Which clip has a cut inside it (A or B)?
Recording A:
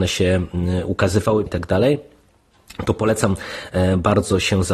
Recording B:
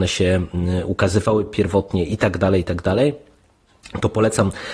A